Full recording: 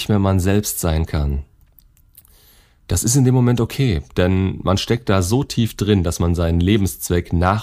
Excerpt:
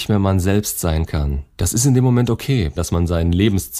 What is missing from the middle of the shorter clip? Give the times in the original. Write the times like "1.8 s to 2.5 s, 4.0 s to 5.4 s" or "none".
1.5 s to 2.8 s, 4.1 s to 6.0 s